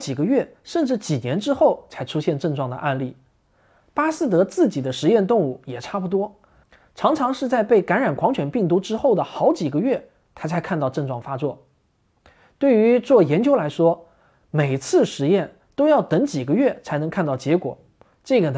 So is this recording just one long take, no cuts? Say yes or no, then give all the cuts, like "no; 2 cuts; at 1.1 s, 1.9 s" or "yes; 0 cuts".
yes; 0 cuts